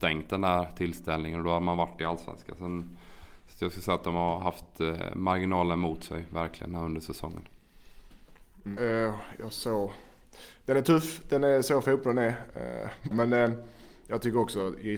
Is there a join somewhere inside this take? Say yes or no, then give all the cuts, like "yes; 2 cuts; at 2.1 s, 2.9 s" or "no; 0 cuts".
yes; 2 cuts; at 8.8 s, 13.1 s